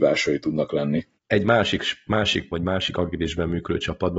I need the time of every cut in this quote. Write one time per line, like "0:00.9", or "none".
0:01.2
0:02.5